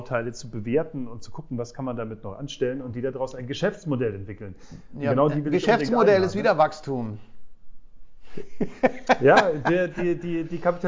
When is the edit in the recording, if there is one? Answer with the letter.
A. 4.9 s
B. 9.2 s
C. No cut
C